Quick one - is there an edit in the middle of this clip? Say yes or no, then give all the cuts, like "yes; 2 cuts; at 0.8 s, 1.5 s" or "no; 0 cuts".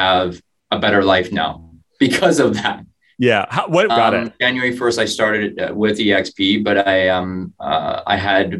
yes; 1 cut; at 3.9 s